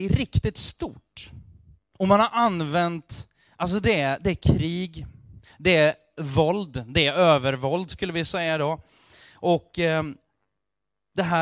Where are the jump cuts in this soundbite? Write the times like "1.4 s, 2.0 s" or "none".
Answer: none